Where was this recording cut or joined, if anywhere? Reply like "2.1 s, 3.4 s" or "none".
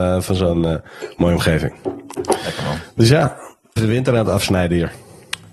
3.8 s